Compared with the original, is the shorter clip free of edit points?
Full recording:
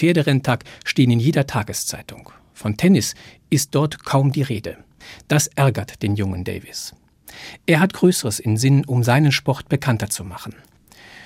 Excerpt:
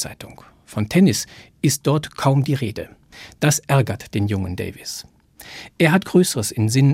yes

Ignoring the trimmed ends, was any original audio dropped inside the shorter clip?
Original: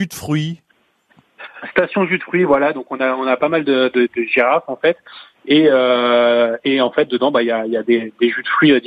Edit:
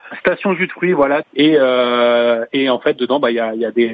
yes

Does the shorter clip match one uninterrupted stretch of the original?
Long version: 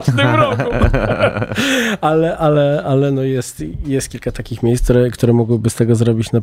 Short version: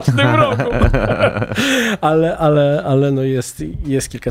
yes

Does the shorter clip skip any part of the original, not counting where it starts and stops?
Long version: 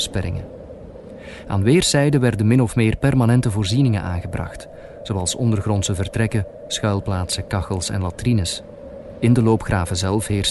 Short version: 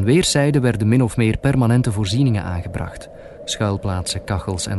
yes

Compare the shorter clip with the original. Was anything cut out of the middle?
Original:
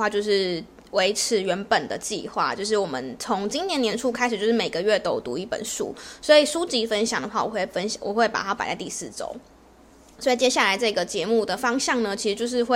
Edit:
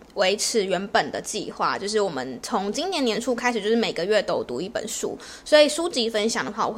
no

